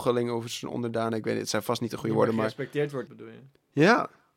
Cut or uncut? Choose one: cut